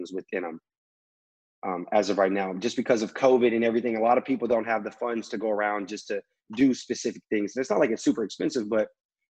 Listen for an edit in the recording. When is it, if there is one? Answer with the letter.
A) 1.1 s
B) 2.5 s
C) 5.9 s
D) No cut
D